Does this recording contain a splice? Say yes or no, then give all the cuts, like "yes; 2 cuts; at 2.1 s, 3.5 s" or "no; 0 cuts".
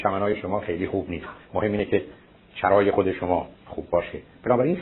yes; 1 cut; at 3.5 s